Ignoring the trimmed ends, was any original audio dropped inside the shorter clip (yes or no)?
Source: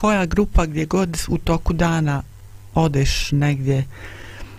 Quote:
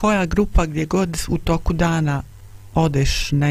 no